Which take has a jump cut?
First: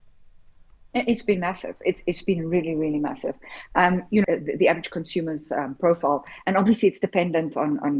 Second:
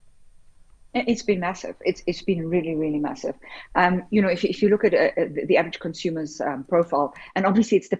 first; 1 cut; at 4.2 s

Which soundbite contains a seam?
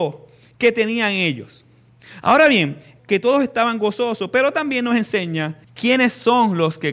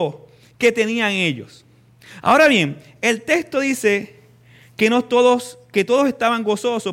first; 2 cuts; at 3.0 s, 5.6 s

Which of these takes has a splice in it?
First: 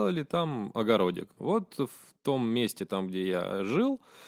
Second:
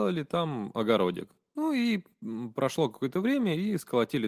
first; 1 cut; at 1.4 s

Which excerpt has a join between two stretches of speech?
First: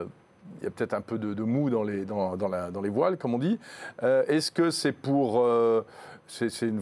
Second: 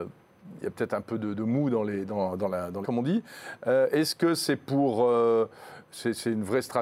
second; 1 cut; at 2.8 s

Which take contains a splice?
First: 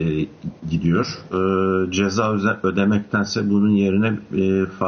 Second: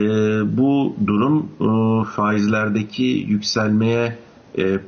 first; 1 cut; at 1.3 s

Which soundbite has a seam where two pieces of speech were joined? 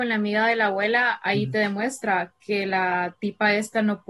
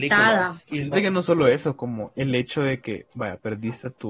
second; 1 cut; at 0.9 s

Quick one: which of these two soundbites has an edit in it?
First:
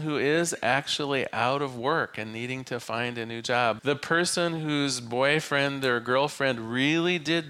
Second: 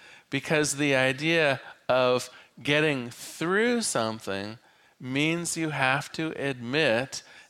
first; 1 cut; at 3.8 s

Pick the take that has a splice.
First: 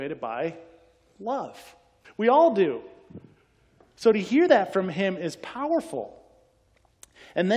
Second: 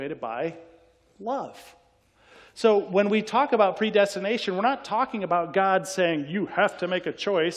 first; 1 cut; at 2.0 s

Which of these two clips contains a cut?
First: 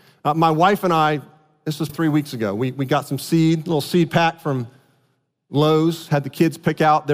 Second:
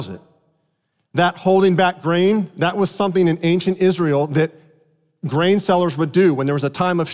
first; 1 cut; at 1.9 s

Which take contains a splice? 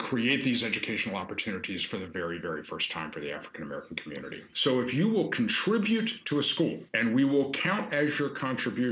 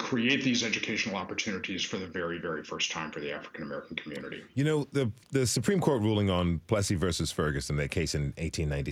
first; 2 cuts; at 4.5 s, 6.9 s

